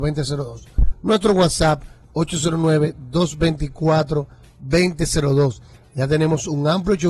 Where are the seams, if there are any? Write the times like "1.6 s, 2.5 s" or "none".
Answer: 0.9 s, 5.8 s